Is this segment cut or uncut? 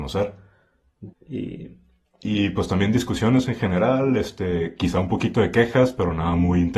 cut